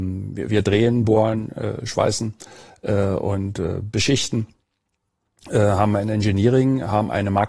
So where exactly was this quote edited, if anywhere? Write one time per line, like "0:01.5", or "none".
none

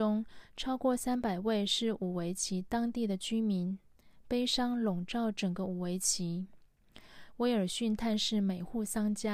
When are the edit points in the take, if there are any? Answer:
none

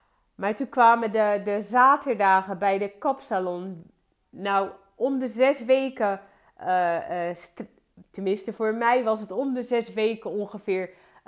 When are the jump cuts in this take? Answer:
none

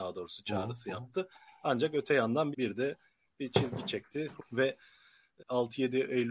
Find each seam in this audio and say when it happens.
0:02.5
0:04.4
0:05.4

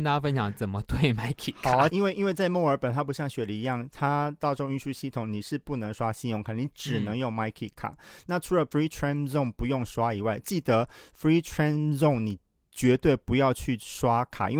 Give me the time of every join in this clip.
0:01.9

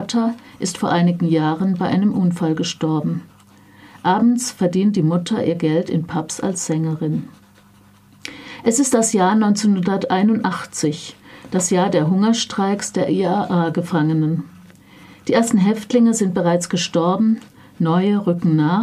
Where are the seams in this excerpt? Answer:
none

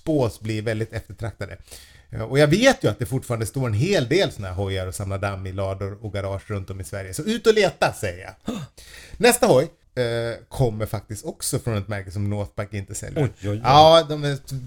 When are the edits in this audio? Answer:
0:09.8
0:13.2

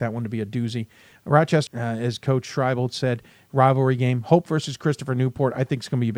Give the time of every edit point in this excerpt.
0:01.7

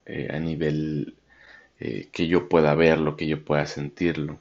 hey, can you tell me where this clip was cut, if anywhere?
none

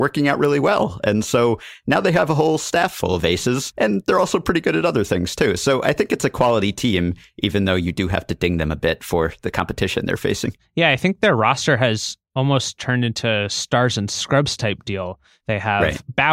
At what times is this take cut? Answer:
none

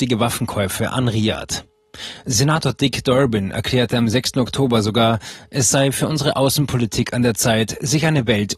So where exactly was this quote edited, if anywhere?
none

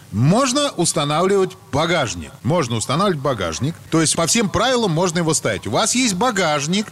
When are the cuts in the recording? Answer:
0:04.2

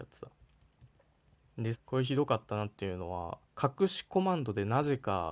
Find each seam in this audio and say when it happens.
0:01.7
0:03.5

